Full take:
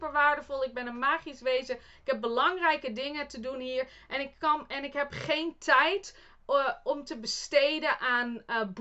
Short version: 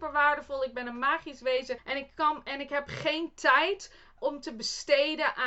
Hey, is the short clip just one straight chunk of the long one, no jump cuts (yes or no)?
no